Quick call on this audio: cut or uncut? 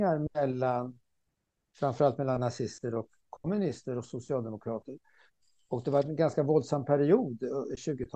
uncut